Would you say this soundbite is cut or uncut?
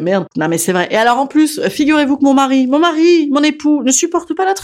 uncut